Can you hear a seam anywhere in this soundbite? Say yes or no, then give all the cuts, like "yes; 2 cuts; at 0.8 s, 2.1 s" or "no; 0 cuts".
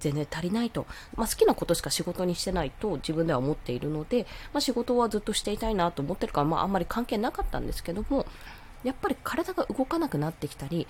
yes; 1 cut; at 1.1 s